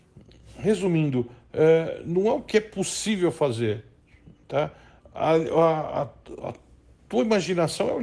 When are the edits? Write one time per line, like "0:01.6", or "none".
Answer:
none